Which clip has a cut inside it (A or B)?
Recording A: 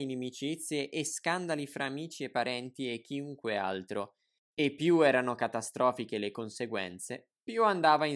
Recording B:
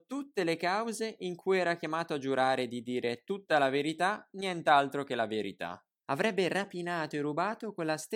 B